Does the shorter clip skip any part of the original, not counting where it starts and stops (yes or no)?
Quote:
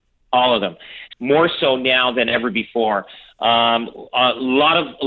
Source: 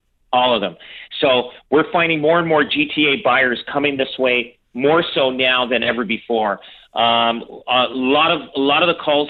yes